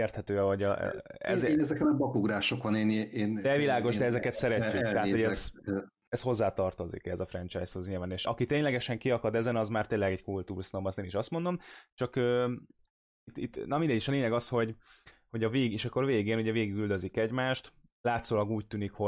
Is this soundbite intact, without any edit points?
no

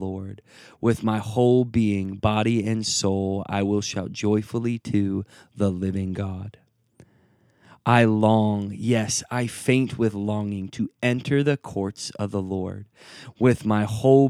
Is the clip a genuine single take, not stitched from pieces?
yes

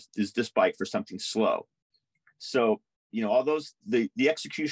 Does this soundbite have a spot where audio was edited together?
yes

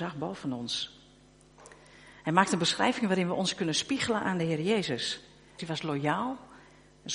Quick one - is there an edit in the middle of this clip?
yes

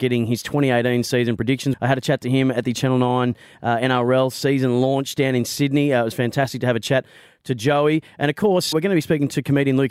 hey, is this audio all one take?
no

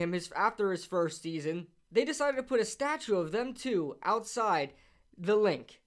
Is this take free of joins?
no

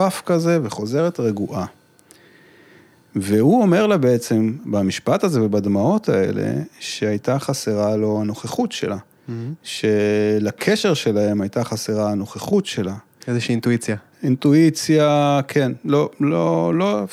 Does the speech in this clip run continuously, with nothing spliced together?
no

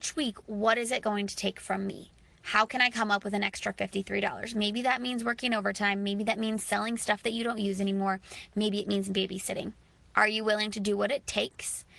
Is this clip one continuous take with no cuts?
yes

